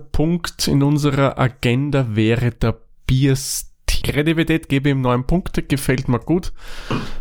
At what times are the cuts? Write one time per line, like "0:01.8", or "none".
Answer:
0:04.0